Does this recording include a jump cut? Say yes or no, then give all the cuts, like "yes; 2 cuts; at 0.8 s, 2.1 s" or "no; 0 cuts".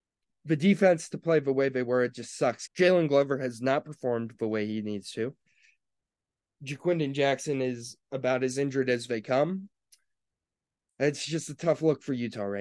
yes; 1 cut; at 2.7 s